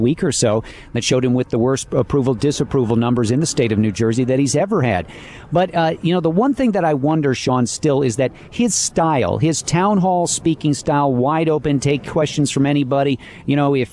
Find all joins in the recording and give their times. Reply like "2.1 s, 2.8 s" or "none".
none